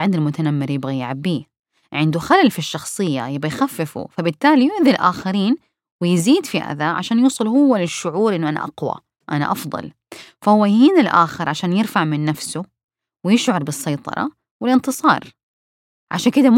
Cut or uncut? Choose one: uncut